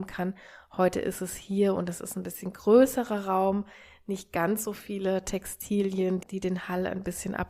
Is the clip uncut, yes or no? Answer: yes